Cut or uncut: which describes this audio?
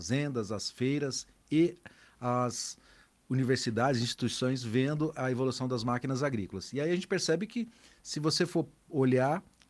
uncut